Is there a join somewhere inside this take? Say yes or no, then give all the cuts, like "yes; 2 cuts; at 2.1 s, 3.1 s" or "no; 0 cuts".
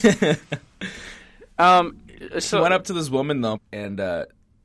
yes; 1 cut; at 3.5 s